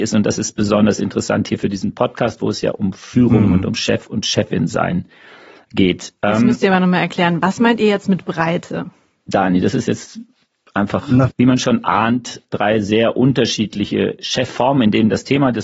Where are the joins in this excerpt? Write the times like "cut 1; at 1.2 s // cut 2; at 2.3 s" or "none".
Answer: cut 1; at 11.3 s